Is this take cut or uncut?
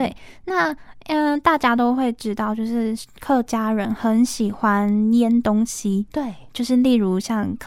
uncut